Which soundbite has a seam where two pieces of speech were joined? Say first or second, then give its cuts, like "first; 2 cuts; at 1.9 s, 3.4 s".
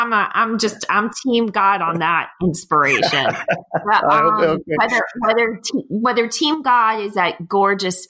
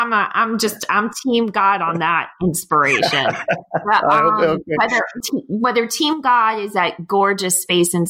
second; 1 cut; at 5.2 s